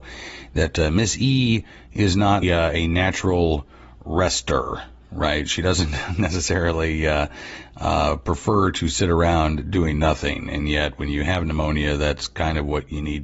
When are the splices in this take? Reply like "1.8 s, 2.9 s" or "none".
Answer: 2.4 s